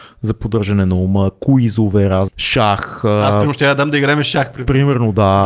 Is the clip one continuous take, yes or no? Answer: no